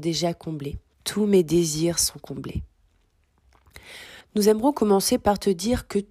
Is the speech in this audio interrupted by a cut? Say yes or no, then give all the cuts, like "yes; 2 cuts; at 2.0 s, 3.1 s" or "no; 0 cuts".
yes; 2 cuts; at 0.9 s, 4.2 s